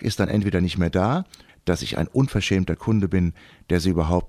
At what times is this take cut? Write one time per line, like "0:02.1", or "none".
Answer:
0:01.5